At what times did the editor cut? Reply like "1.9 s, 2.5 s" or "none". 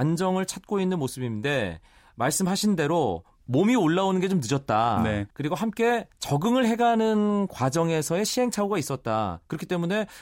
5.3 s